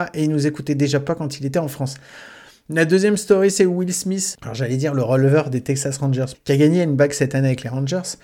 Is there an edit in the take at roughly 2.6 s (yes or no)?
no